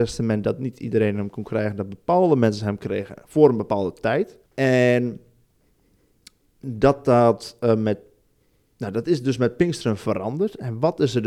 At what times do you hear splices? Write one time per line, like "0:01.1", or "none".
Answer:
0:04.4